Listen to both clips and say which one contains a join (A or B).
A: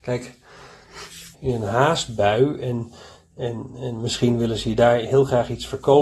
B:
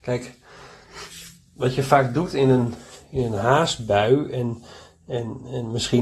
A